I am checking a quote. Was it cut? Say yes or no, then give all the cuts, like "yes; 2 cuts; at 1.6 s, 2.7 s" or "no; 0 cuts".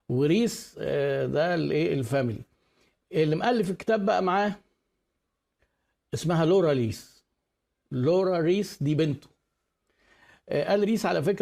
no; 0 cuts